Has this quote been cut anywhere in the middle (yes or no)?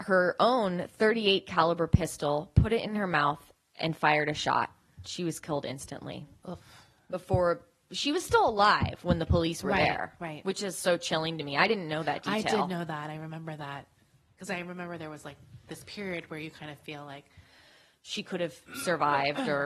no